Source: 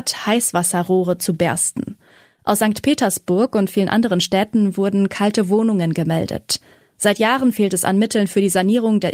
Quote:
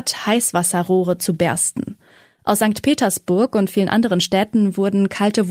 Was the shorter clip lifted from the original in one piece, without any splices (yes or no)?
yes